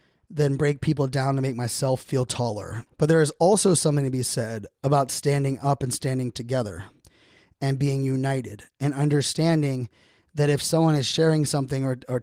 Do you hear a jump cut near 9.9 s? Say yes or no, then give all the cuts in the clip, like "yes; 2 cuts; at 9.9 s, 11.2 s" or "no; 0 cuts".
no; 1 cut; at 2.9 s